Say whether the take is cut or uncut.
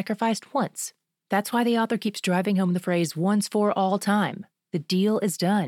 uncut